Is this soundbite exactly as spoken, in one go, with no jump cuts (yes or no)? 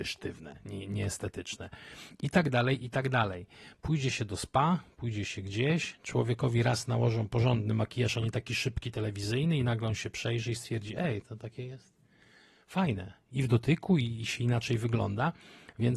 yes